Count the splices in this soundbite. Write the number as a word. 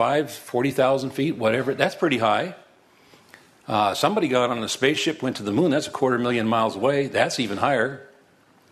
zero